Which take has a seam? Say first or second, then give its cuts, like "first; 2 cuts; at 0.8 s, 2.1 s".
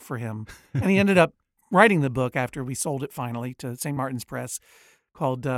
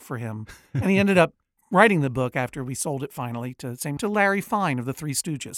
second; 1 cut; at 4.0 s